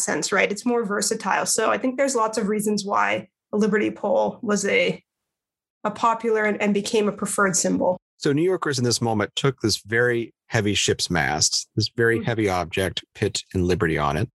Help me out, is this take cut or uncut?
cut